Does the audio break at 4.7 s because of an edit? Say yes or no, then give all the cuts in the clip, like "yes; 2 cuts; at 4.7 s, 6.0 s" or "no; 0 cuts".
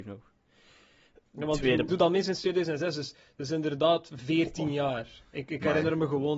no; 1 cut; at 1.9 s